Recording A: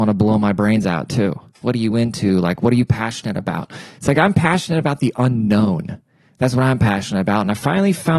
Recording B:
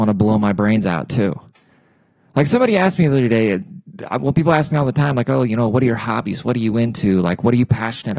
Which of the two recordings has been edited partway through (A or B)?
A